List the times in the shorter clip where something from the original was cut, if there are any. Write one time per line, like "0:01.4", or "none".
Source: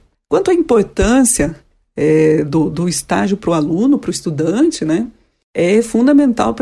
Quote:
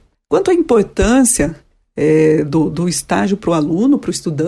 none